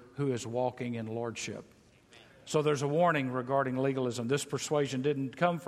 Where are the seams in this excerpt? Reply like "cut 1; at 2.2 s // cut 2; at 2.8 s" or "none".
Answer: none